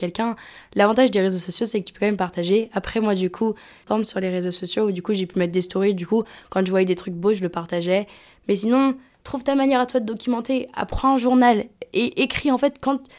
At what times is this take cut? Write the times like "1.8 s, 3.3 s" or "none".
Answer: none